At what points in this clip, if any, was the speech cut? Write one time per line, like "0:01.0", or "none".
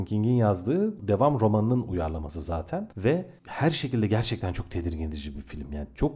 none